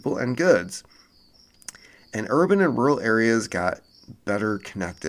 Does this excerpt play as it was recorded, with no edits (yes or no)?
yes